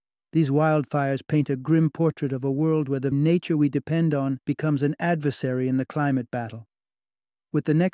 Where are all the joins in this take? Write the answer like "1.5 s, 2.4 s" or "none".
3.1 s, 4.4 s

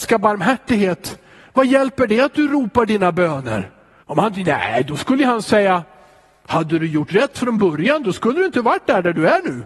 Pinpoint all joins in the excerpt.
4.0 s

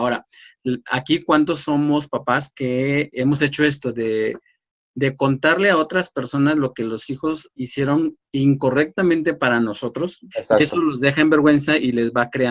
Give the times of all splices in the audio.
3.1 s, 10.3 s

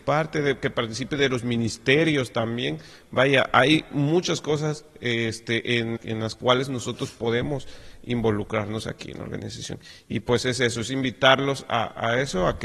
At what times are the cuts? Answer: 6.0 s

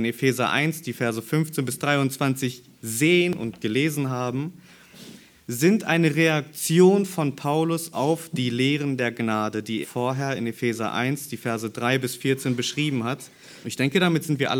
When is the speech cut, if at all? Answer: 9.8 s, 13.6 s

